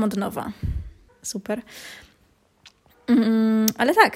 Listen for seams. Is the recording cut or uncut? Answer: cut